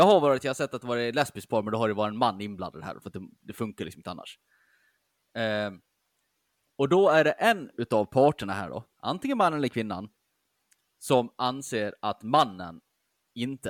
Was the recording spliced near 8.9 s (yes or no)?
no